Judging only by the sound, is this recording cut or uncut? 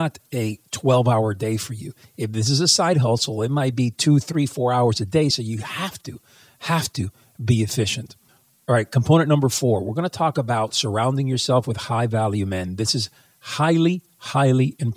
uncut